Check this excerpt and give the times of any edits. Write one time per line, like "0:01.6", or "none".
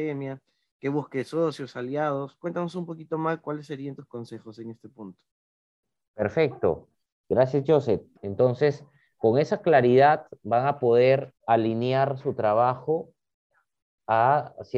0:08.2
0:11.4